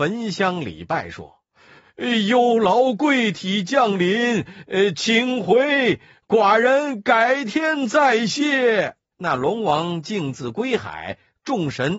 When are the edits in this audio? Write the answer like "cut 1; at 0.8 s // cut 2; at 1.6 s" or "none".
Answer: cut 1; at 9.1 s